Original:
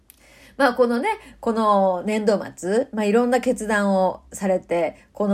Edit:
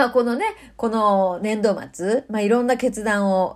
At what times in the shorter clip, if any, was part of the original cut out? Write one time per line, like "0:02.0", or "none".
none